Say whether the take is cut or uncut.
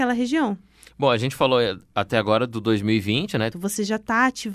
cut